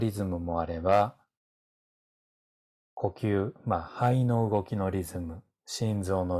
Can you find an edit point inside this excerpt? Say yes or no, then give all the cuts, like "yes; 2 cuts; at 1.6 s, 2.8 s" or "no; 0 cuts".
no; 0 cuts